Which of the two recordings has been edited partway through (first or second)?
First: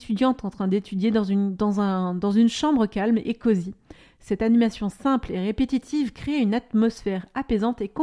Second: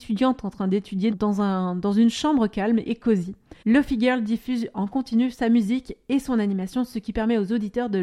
second